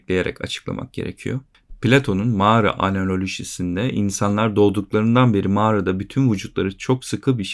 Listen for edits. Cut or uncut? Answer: uncut